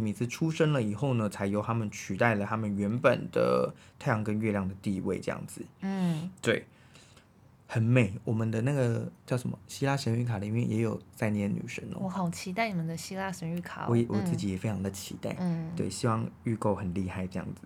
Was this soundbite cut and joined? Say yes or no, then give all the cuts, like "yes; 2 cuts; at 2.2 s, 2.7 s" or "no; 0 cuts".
yes; 1 cut; at 14.1 s